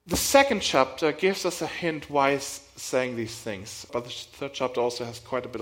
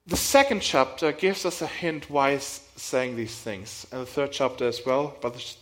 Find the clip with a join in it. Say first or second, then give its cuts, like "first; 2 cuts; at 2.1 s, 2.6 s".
first; 1 cut; at 3.9 s